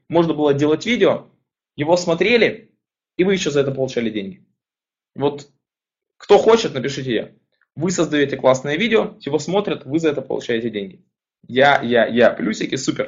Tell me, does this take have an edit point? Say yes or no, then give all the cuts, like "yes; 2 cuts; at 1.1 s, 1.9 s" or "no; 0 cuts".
no; 0 cuts